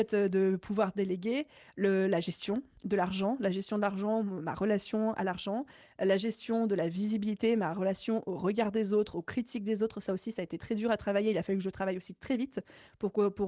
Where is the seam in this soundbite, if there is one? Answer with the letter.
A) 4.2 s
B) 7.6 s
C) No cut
C